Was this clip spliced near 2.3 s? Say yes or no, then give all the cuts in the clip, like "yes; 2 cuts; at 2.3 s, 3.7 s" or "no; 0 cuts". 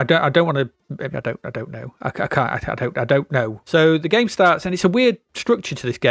no; 2 cuts; at 1.1 s, 3.6 s